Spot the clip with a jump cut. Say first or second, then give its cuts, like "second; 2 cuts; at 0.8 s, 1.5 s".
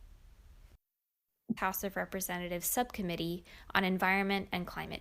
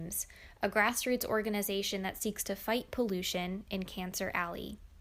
first; 1 cut; at 1.6 s